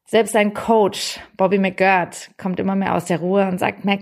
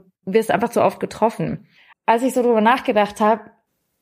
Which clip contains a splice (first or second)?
second